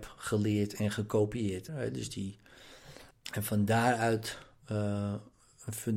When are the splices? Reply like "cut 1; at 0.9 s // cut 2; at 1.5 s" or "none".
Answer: cut 1; at 1.7 s // cut 2; at 3.1 s